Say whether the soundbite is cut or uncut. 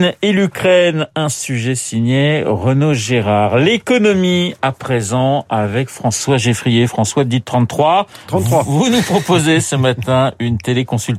uncut